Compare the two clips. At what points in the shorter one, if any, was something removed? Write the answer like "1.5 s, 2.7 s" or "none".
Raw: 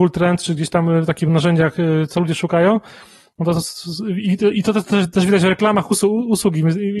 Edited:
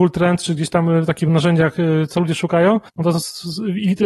2.9 s

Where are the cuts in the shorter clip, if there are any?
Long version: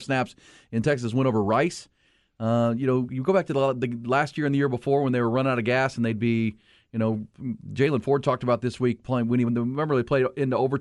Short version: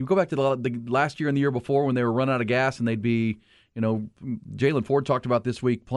none

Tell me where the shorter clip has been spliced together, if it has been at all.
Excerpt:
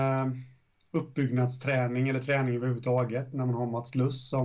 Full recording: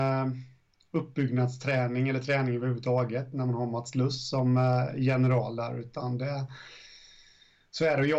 none

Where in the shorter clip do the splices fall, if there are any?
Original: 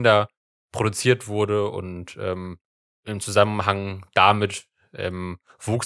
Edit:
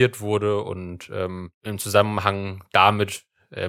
1.5 s

